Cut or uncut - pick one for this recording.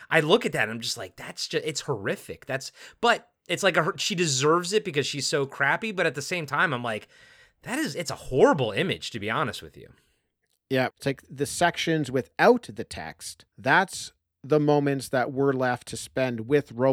cut